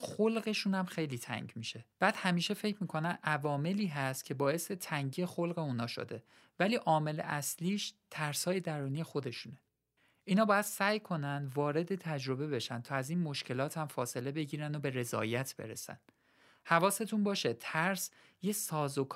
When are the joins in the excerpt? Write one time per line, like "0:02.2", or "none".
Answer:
0:01.9

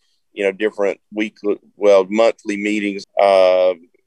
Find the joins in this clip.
0:03.0

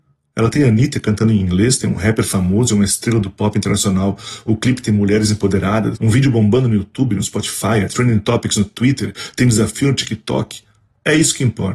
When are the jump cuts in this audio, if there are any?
0:05.9

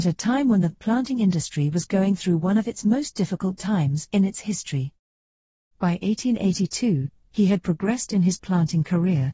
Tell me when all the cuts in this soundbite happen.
none

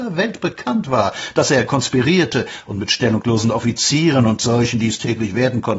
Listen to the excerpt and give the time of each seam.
none

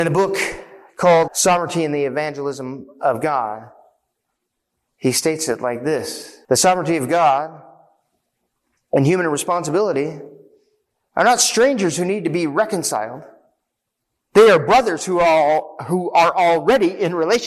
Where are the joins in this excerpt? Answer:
0:01.3
0:06.4

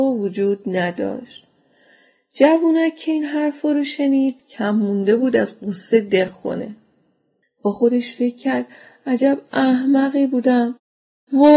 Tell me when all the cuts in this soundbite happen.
none

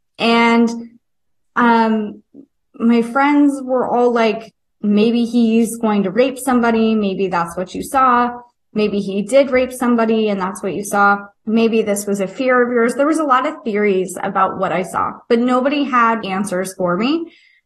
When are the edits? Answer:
0:11.4
0:16.2

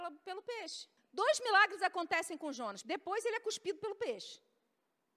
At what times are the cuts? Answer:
0:01.0
0:02.8

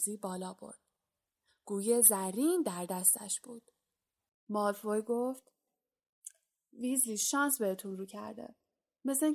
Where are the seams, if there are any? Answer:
0:04.3

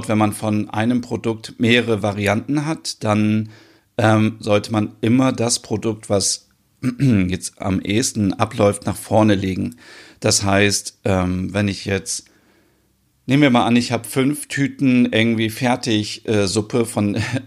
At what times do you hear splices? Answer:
none

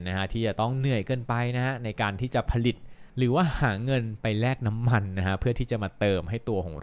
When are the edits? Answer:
0:03.1

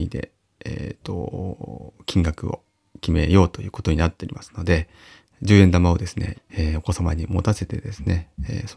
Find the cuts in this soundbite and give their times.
0:06.3

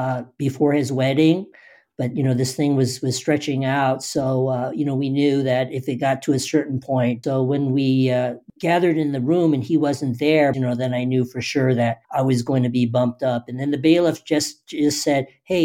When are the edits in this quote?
0:07.2
0:10.5
0:12.0

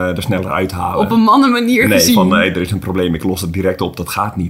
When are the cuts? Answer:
none

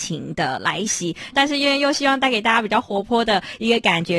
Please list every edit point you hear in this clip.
0:01.3

